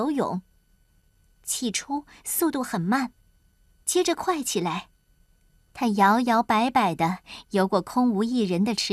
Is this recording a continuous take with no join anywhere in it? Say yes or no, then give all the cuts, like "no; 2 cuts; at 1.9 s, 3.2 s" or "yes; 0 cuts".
yes; 0 cuts